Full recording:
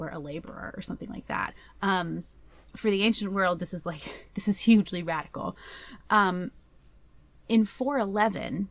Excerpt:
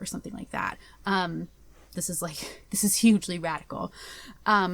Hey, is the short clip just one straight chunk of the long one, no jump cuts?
no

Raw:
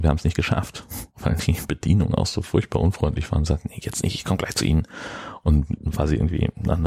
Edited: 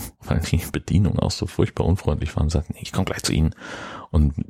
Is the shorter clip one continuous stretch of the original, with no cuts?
no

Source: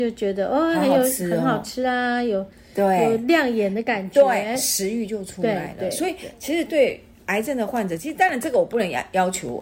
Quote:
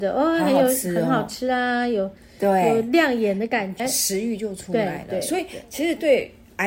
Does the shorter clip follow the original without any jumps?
no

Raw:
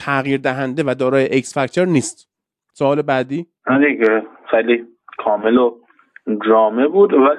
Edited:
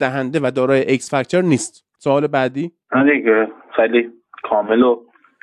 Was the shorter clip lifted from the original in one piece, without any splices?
no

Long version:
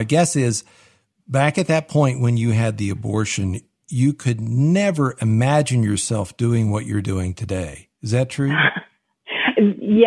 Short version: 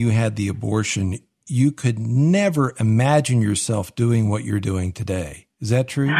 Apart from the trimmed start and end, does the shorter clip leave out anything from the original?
no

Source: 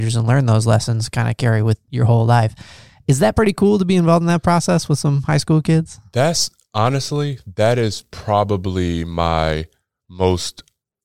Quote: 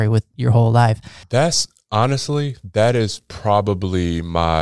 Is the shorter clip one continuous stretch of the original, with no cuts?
no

